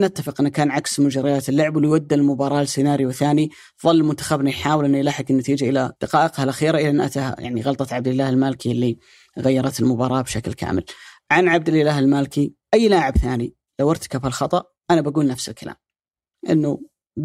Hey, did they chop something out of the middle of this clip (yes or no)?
yes